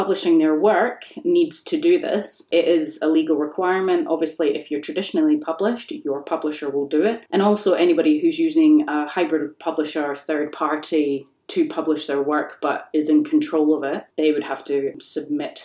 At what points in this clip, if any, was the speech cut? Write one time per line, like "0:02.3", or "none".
none